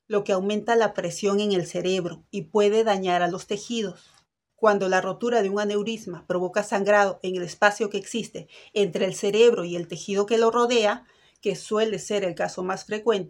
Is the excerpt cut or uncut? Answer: cut